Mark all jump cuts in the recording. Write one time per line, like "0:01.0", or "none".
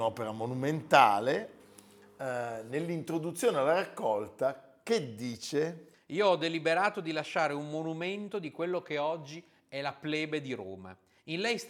none